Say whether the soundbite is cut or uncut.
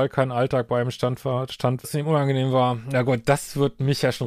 cut